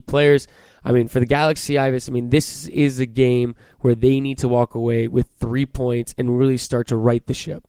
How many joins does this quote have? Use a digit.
0